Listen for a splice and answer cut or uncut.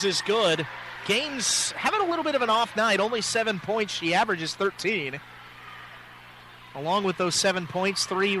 uncut